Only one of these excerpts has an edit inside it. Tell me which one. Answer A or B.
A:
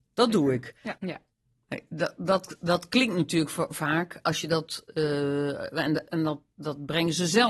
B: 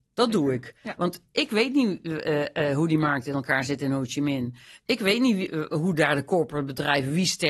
A